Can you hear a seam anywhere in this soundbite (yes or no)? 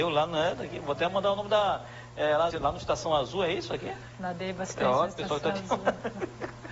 yes